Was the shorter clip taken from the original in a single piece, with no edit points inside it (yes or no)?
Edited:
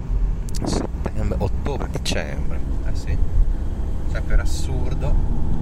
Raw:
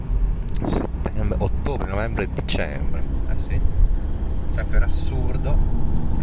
no